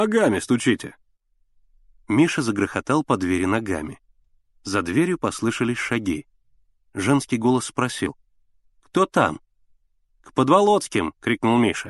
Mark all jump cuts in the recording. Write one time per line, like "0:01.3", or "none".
none

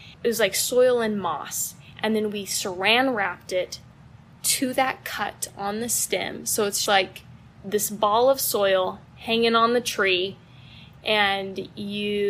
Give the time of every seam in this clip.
0:06.9

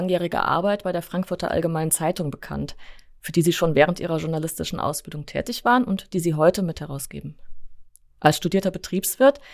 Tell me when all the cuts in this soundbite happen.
none

